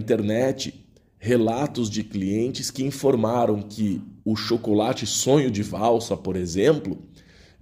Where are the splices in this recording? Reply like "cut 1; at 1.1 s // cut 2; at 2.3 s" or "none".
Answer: cut 1; at 4.2 s